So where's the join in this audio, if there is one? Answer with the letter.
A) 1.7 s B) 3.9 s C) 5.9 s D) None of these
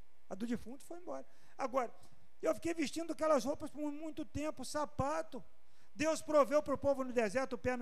D